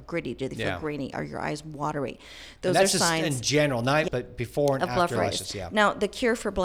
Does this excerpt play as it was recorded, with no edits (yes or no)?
no